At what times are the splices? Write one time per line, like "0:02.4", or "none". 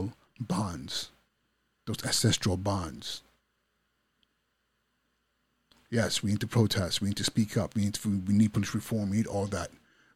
none